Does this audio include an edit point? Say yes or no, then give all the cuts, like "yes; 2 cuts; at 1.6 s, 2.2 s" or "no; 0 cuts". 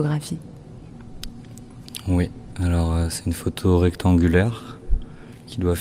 no; 0 cuts